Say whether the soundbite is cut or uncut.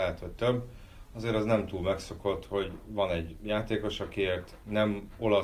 uncut